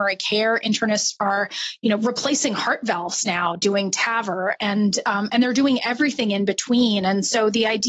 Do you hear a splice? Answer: no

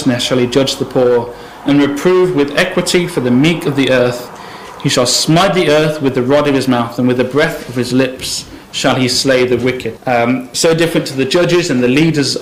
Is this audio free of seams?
no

